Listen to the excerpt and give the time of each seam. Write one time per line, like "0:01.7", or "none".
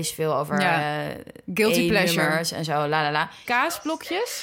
0:03.4

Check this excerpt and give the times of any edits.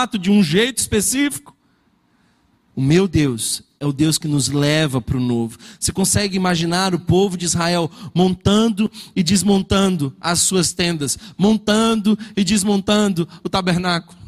0:02.7

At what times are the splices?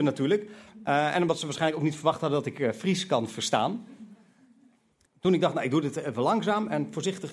0:05.1

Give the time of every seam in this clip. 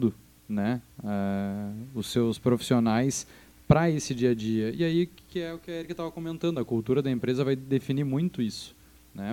none

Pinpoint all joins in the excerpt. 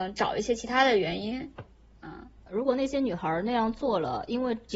0:02.5

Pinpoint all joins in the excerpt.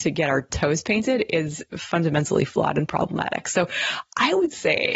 none

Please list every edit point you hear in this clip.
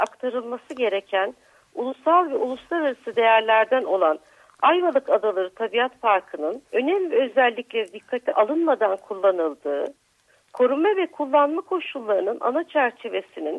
0:06.7

